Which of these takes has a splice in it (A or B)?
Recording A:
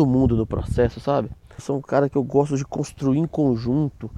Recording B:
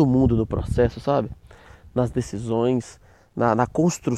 A